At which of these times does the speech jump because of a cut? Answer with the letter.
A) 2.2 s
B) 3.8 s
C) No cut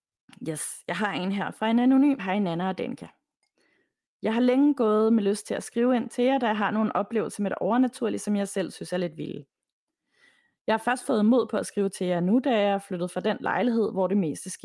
A